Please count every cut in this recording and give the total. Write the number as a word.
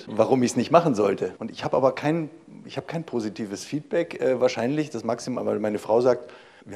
one